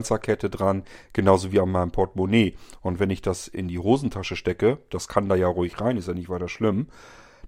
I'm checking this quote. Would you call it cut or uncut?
uncut